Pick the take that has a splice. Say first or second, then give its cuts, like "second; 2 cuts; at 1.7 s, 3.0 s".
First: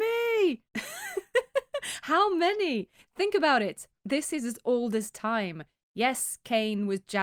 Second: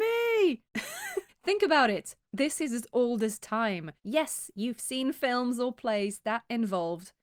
second; 2 cuts; at 1.3 s, 4.0 s